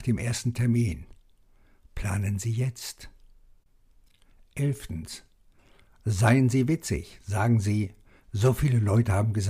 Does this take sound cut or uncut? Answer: uncut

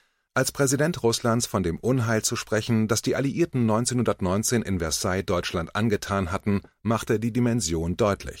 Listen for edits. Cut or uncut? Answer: uncut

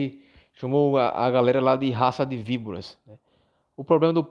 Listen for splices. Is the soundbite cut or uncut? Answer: uncut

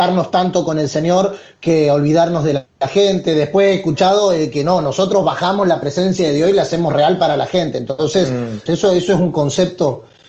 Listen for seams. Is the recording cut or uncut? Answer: cut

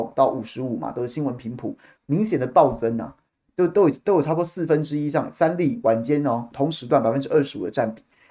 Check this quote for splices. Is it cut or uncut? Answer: cut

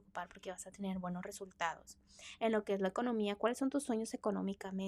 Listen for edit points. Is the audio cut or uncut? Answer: uncut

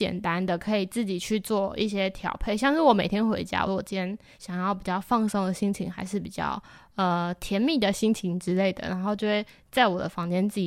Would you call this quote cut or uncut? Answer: cut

